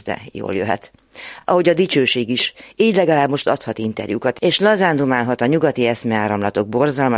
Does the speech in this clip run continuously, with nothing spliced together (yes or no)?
yes